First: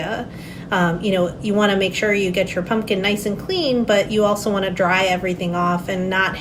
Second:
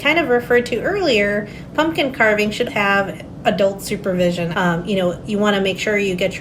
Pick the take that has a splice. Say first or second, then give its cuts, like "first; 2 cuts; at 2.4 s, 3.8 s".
second; 2 cuts; at 2.7 s, 4.5 s